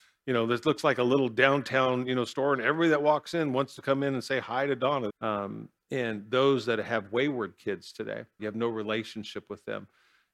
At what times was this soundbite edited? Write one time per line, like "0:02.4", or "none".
0:05.1
0:08.4